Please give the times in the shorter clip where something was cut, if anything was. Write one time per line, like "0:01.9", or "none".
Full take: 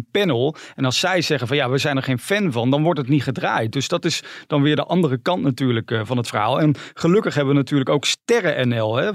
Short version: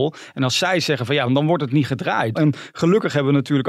0:01.3
0:02.4